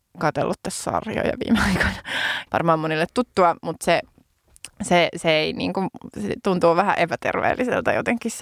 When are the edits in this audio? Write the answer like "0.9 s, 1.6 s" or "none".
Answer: 2.5 s